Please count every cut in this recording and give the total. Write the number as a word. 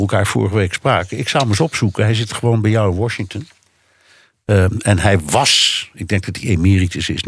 zero